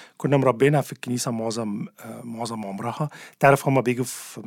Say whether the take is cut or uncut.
uncut